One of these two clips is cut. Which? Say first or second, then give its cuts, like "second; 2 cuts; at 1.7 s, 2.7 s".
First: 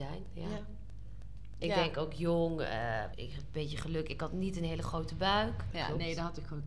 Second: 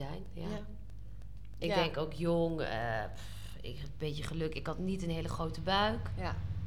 first; 2 cuts; at 3.1 s, 5.7 s